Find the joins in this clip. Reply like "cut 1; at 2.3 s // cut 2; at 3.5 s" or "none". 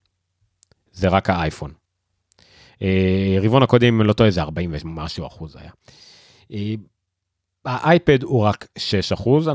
none